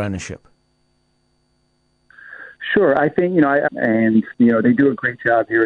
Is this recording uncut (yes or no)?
no